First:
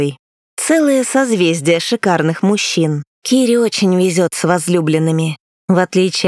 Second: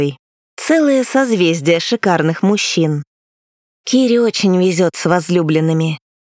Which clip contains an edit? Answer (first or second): first